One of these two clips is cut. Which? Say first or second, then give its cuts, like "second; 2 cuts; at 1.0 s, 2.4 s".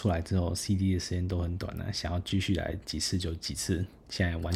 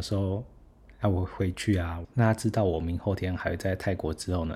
second; 1 cut; at 2.0 s